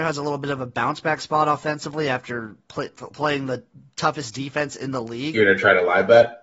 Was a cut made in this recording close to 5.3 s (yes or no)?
yes